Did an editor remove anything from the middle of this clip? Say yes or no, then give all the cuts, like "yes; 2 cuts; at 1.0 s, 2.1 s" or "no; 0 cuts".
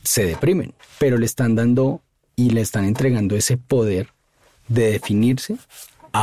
no; 0 cuts